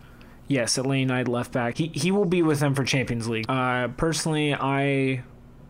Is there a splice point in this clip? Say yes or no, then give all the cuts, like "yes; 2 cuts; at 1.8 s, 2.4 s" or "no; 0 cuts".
yes; 2 cuts; at 1.7 s, 3.5 s